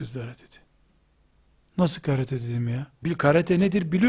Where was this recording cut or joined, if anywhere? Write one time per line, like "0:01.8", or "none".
0:03.0